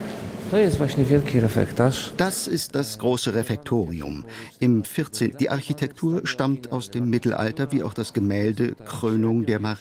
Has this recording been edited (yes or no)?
yes